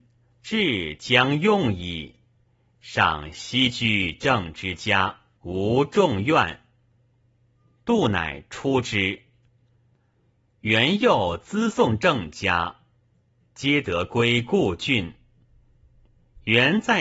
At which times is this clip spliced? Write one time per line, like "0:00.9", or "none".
0:05.4